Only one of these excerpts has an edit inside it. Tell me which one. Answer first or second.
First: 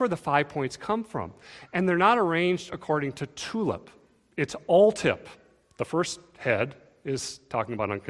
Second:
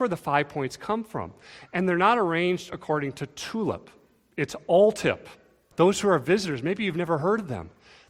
second